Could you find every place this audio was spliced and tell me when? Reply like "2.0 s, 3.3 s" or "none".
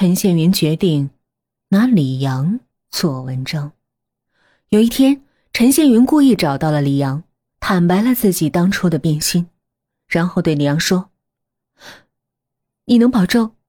none